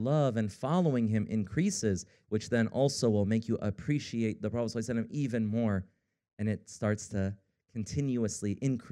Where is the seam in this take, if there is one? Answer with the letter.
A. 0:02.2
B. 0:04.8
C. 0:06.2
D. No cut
A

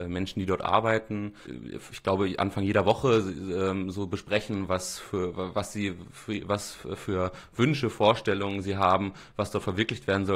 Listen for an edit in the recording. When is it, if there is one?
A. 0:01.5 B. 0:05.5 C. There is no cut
A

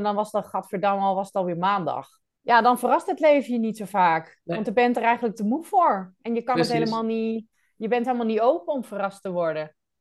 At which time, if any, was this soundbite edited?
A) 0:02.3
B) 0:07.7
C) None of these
A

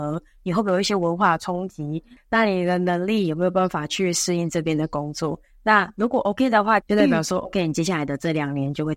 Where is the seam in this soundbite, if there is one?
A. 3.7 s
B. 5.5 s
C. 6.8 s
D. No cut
C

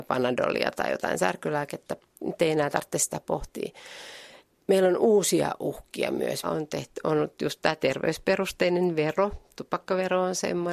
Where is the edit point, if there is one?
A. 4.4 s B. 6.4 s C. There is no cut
B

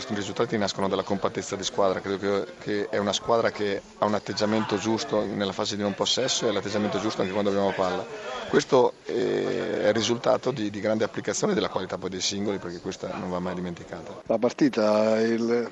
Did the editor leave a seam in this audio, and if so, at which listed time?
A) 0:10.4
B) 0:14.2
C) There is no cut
B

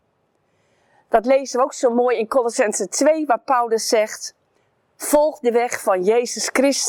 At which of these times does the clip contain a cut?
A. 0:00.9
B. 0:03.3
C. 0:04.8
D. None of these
D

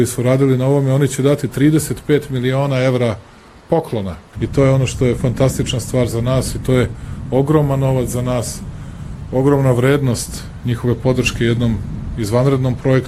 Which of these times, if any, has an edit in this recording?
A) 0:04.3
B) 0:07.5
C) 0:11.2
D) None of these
A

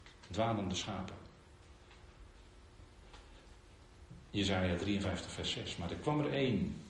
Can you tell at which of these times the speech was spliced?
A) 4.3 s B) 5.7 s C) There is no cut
C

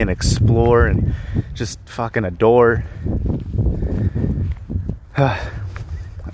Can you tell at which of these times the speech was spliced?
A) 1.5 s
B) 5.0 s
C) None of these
C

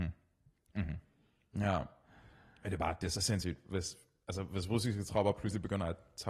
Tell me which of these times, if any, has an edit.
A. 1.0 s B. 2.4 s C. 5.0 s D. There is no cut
D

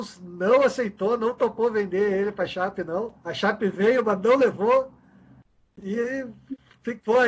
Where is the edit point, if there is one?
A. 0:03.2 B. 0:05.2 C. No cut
A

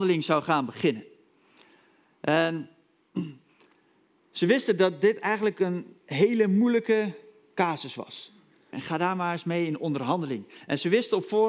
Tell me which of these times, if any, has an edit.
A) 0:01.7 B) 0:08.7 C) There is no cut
B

